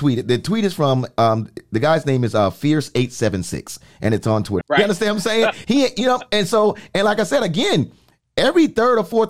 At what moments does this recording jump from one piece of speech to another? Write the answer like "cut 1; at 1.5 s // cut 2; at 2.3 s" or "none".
cut 1; at 4.6 s // cut 2; at 5.6 s

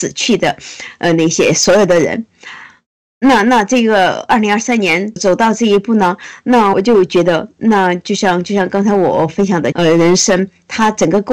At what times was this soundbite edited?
cut 1; at 5.2 s // cut 2; at 6.7 s // cut 3; at 9.7 s

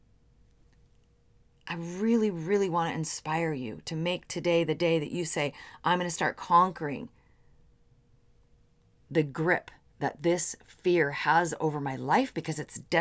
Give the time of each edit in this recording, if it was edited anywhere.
none

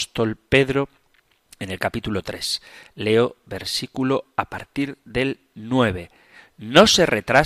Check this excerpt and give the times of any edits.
none

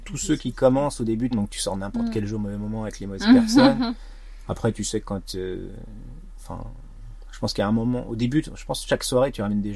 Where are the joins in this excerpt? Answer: cut 1; at 1.3 s

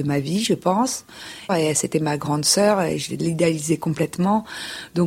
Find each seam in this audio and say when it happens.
cut 1; at 1.5 s

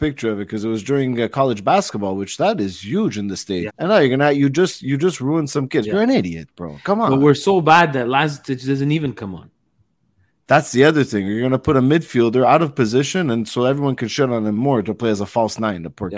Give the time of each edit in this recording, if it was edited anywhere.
cut 1; at 3.7 s // cut 2; at 5.8 s

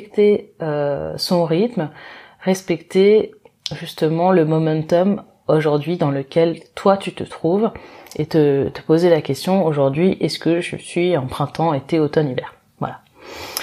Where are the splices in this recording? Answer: none

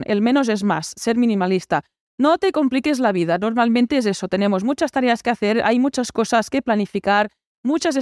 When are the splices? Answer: none

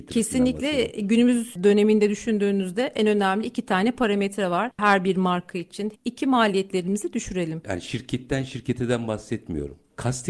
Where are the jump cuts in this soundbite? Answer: cut 1; at 5.9 s // cut 2; at 7.6 s

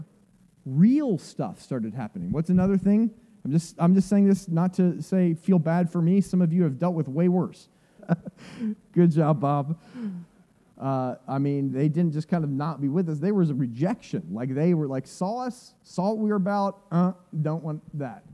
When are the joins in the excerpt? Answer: cut 1; at 8.0 s // cut 2; at 10.7 s

